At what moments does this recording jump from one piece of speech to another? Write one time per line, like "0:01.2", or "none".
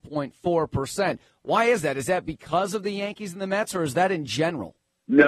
none